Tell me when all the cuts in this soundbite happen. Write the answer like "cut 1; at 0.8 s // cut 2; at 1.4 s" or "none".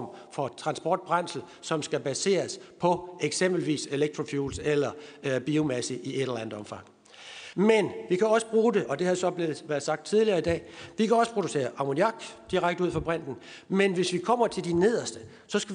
cut 1; at 7.5 s